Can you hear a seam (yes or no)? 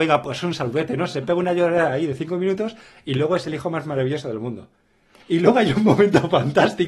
no